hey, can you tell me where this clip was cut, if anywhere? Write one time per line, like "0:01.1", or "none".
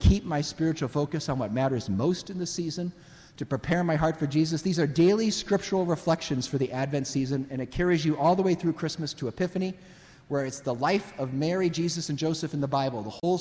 none